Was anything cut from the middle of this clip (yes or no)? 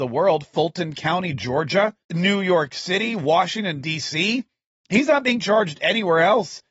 yes